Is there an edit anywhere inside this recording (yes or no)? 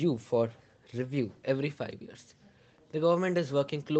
no